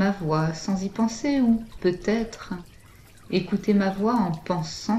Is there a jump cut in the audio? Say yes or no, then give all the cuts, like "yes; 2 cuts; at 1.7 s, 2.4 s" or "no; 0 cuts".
no; 0 cuts